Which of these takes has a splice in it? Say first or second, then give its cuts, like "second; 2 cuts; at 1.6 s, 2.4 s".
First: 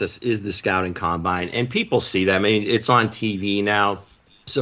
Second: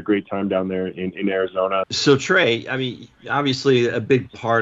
second; 1 cut; at 1.8 s